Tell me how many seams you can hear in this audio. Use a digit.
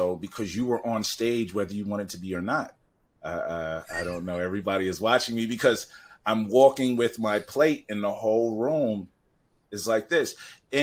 1